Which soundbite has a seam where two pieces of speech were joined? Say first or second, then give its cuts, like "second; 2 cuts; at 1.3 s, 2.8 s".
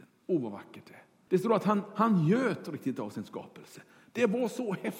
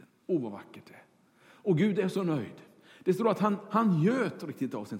first; 1 cut; at 1.3 s